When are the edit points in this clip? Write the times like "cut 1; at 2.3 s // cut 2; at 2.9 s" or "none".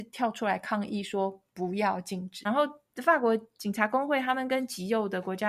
cut 1; at 2.4 s